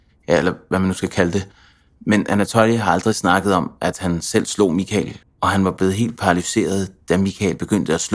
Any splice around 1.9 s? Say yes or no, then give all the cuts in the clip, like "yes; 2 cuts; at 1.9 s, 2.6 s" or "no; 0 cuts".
no; 1 cut; at 5.2 s